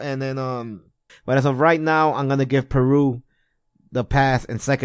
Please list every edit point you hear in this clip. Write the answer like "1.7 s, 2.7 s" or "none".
1.1 s